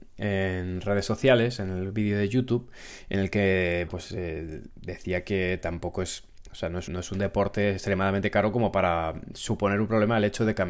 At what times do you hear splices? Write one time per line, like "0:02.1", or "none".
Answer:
0:03.9
0:06.9